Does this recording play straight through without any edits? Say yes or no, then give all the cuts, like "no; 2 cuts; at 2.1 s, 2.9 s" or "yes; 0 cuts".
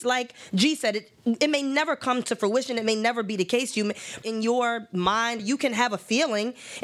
no; 2 cuts; at 4.2 s, 5.4 s